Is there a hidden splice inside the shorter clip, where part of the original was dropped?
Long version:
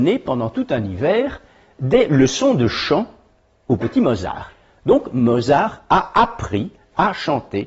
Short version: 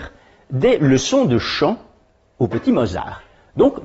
no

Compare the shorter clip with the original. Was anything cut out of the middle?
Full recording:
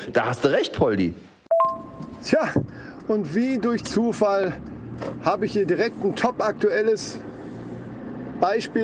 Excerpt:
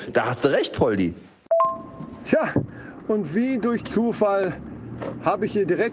no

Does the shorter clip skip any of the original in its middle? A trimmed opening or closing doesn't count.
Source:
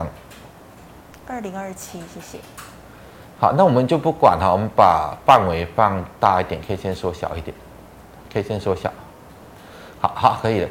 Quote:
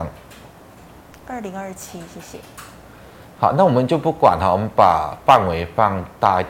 no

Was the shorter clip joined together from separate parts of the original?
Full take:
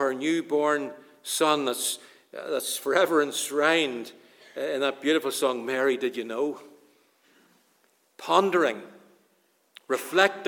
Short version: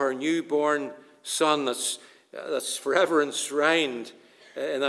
no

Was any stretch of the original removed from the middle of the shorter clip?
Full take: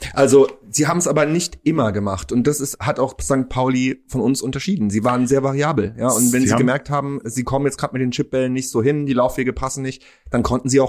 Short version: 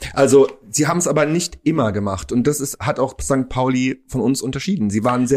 no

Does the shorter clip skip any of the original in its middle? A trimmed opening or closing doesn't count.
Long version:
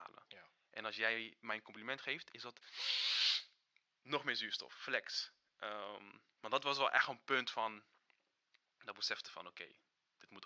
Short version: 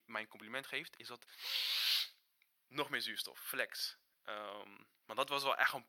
no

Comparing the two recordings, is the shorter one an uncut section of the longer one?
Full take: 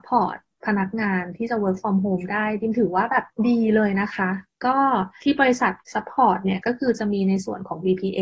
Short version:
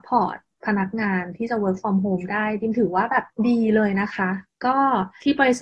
yes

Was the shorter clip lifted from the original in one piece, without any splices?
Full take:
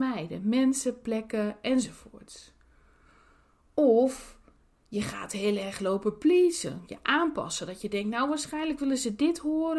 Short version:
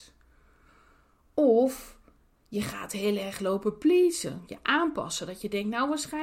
yes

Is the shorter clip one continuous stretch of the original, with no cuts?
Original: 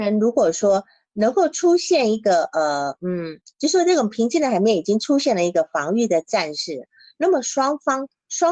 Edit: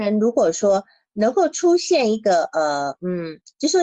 yes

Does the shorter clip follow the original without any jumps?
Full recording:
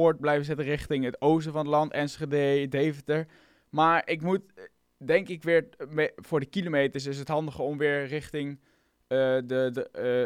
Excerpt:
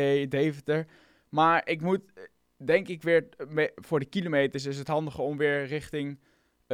yes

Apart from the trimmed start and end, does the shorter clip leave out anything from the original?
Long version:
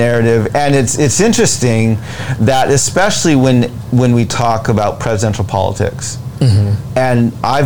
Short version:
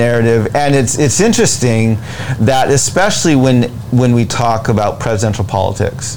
no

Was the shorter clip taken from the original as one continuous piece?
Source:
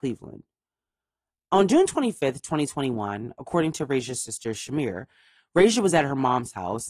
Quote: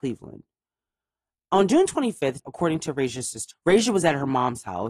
no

